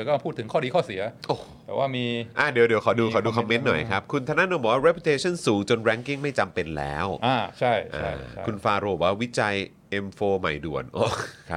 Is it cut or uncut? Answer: uncut